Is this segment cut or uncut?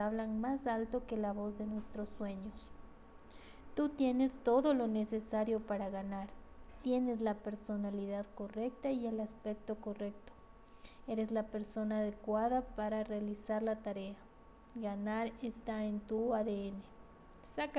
cut